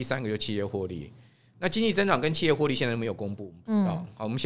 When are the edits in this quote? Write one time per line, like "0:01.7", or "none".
none